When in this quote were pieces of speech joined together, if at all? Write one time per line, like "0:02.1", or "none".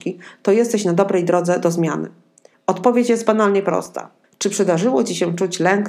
0:02.5
0:04.2